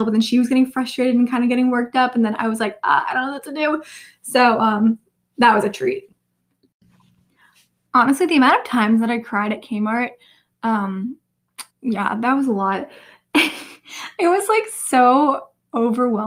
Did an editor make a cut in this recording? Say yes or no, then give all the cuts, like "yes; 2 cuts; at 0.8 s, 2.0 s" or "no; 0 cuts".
yes; 1 cut; at 11.7 s